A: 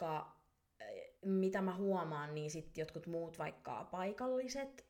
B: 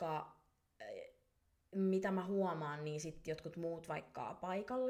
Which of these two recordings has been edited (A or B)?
A